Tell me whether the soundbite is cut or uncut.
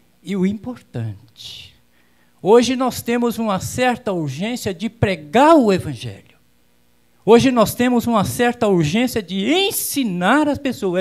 uncut